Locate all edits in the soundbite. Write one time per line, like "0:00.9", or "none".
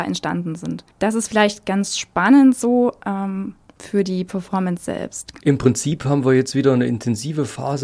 0:00.9
0:05.4